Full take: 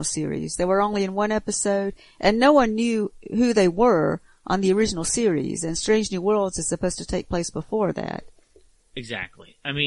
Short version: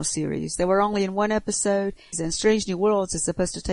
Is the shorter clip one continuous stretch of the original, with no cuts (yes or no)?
no